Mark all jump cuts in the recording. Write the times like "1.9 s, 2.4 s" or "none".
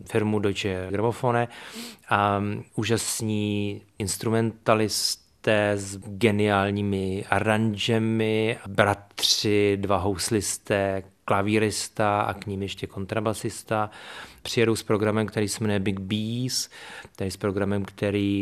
none